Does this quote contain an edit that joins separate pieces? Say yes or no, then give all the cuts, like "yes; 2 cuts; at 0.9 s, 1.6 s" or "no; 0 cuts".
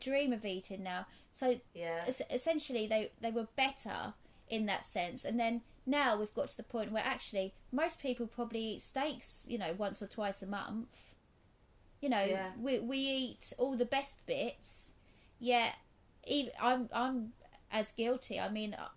no; 0 cuts